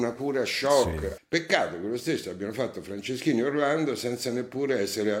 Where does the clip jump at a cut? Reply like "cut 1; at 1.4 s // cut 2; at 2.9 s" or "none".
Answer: cut 1; at 1.2 s